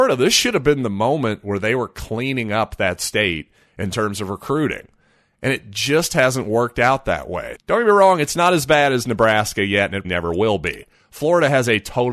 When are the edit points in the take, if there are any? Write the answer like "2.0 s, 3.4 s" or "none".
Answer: 7.5 s, 10.0 s